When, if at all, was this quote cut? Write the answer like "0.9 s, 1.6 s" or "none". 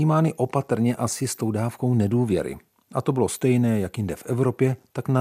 none